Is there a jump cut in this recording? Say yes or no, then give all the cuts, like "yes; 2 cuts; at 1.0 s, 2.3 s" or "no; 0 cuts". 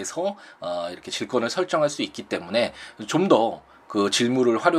no; 0 cuts